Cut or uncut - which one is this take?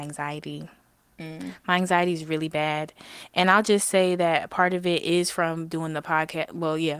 uncut